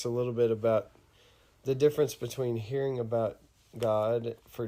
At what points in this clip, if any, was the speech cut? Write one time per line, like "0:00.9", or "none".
none